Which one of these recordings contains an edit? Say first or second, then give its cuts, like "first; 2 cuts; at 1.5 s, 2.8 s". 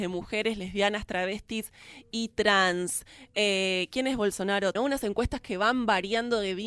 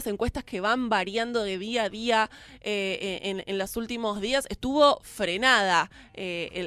first; 1 cut; at 4.7 s